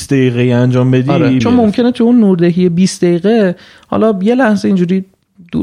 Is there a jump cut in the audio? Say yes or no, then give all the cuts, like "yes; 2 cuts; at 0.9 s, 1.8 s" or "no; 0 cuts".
yes; 1 cut; at 1.4 s